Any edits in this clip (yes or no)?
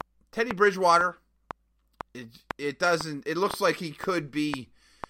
no